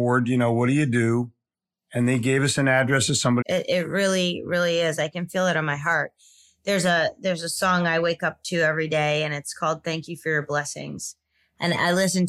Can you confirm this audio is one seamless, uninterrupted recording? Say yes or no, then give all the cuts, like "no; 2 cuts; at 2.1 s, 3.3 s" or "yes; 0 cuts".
no; 1 cut; at 3.4 s